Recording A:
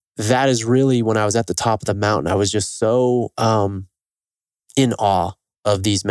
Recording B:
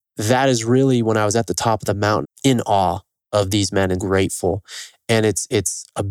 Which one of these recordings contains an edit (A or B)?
B